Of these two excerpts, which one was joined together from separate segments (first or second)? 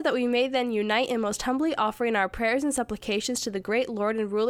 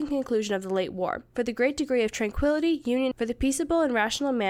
second